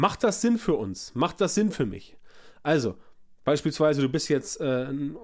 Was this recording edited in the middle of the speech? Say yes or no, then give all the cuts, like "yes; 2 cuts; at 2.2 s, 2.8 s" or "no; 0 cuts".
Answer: no; 0 cuts